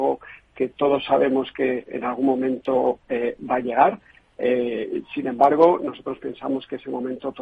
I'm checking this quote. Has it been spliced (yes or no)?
no